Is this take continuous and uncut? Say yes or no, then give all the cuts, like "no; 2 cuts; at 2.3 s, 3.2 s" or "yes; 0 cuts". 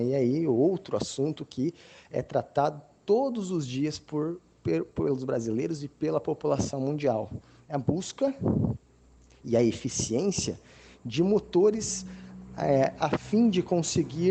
yes; 0 cuts